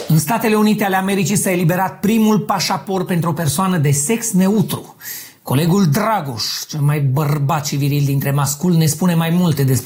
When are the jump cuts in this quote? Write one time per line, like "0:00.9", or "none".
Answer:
none